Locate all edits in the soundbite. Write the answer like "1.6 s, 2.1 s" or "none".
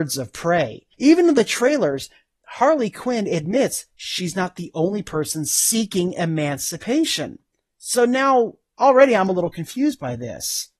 none